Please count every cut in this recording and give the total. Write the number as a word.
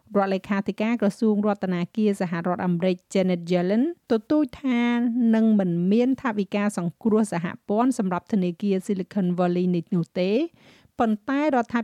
one